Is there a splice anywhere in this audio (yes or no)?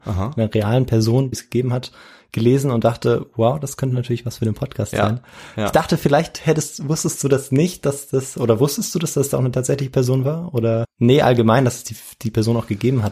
yes